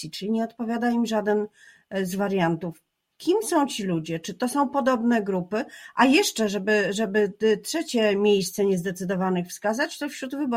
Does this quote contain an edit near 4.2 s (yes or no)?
no